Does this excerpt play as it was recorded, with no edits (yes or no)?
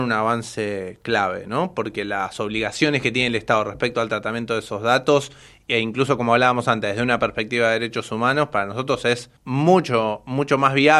no